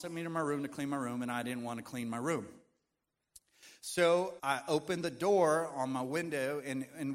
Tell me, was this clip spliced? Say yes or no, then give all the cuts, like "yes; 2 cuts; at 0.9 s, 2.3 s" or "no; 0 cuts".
yes; 1 cut; at 4.4 s